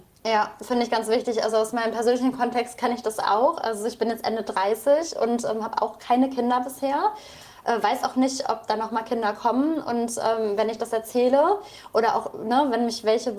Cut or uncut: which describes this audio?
uncut